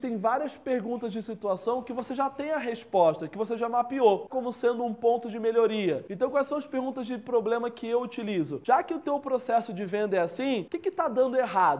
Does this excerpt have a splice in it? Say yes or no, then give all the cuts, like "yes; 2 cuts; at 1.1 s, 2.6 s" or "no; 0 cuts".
yes; 1 cut; at 4.3 s